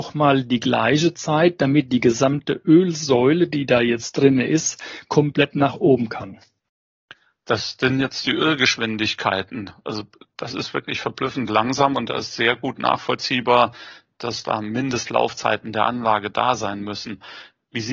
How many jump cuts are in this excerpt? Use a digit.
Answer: 0